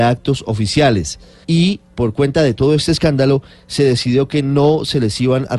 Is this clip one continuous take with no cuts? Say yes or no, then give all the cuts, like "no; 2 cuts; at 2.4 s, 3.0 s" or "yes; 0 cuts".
no; 1 cut; at 1.4 s